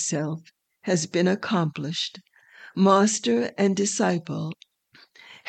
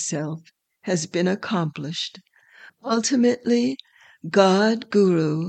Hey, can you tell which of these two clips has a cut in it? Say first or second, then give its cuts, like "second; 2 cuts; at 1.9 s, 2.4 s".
second; 1 cut; at 2.7 s